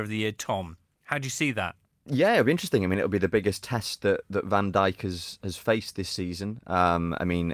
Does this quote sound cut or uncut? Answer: uncut